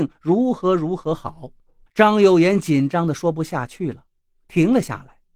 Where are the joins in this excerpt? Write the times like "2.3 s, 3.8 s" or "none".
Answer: 1.9 s